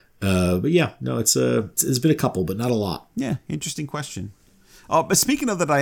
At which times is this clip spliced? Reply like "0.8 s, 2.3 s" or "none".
1.8 s